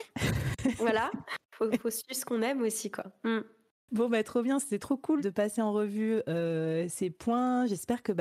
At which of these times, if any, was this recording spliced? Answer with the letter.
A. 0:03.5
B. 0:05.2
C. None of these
B